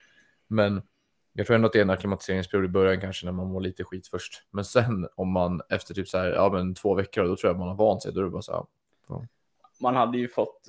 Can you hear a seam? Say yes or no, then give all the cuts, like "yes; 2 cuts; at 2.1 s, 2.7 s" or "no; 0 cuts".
no; 0 cuts